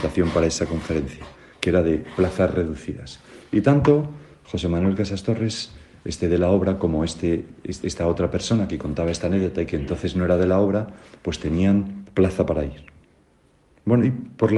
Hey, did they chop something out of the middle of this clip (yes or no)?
no